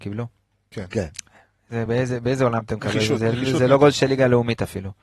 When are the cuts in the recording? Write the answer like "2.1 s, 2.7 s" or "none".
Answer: none